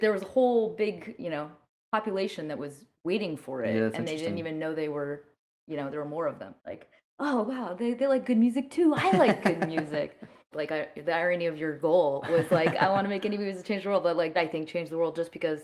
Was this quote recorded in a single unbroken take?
no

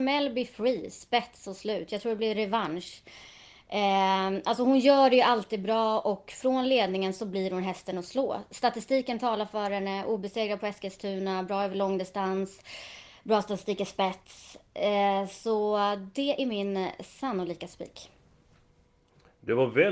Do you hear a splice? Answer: no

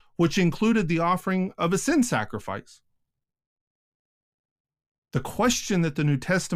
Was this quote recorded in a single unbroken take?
yes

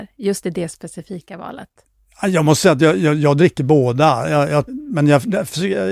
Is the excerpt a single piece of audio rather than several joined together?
no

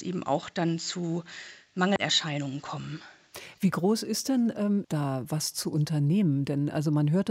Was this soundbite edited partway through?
yes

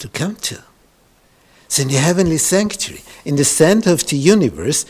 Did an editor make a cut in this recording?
no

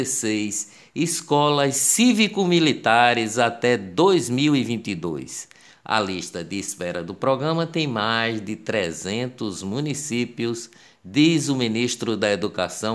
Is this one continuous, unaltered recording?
yes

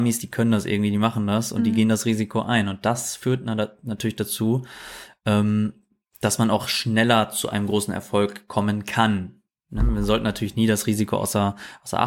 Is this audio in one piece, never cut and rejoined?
yes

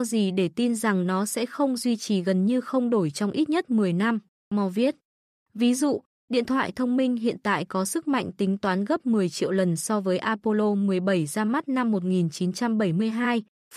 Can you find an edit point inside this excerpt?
yes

